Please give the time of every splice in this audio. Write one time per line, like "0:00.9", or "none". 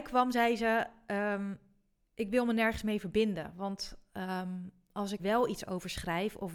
0:05.2

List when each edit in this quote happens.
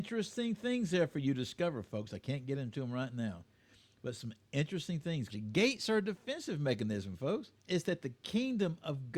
0:05.3
0:07.6

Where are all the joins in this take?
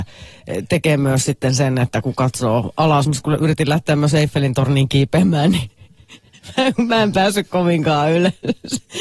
0:03.1

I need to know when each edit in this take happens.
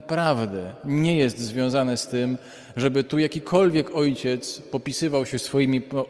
none

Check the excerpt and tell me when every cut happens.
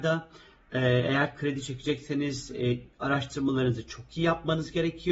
none

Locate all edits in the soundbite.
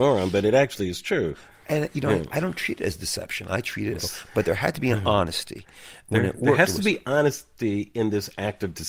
0:04.0

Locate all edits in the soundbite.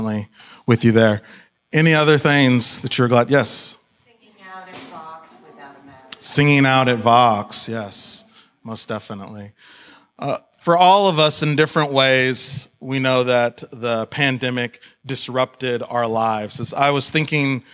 none

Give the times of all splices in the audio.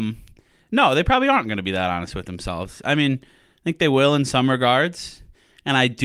none

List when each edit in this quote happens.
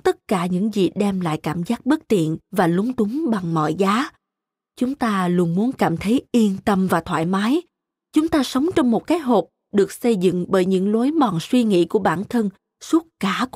none

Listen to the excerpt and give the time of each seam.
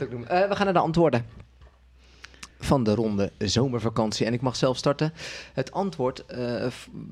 0:02.5

